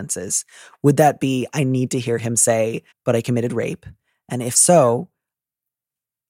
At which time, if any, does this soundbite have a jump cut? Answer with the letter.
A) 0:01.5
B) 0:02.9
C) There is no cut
B